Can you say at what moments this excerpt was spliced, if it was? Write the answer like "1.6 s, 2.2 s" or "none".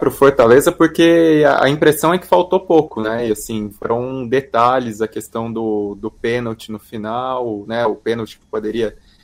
none